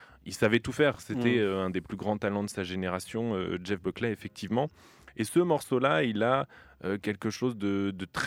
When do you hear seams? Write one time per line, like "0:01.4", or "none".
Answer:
none